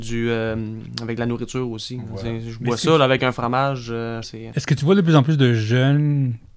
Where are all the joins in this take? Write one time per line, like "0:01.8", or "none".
0:04.2